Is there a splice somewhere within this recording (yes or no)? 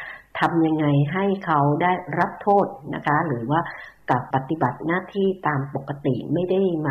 yes